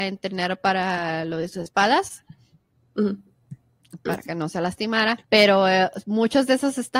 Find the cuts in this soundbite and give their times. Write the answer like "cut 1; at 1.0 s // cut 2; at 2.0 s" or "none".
cut 1; at 4.1 s // cut 2; at 5.2 s